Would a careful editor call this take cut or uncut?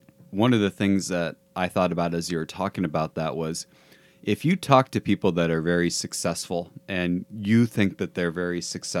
cut